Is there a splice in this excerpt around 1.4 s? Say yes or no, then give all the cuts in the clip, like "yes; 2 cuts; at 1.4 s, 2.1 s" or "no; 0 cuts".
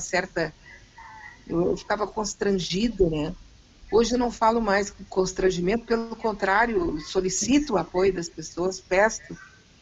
no; 0 cuts